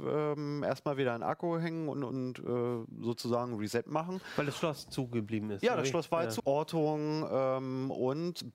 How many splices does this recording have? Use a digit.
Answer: 1